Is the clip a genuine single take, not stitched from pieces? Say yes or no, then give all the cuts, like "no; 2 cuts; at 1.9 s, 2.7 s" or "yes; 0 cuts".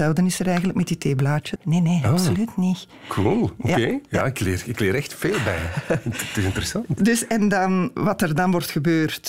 no; 2 cuts; at 1.6 s, 8.0 s